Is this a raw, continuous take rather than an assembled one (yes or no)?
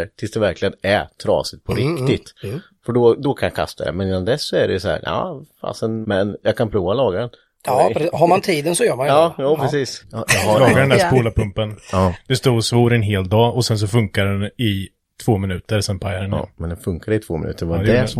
no